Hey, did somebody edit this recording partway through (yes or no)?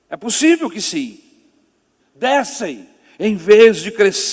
yes